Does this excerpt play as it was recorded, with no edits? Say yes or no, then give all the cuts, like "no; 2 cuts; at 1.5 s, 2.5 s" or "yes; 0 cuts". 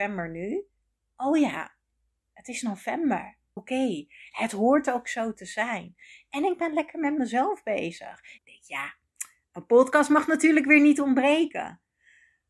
no; 2 cuts; at 3.6 s, 8.4 s